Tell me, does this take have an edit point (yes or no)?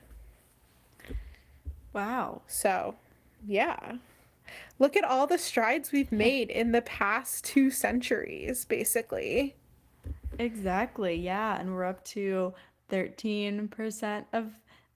no